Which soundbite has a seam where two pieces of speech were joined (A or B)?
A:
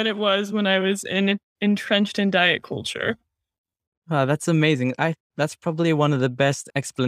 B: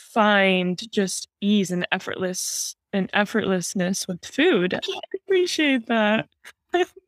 B